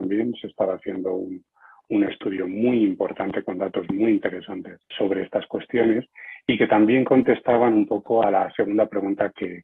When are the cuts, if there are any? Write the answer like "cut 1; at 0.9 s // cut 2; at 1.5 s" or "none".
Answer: cut 1; at 4.9 s